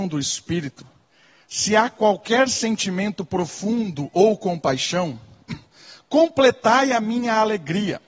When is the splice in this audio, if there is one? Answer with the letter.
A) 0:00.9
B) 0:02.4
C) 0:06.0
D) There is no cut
D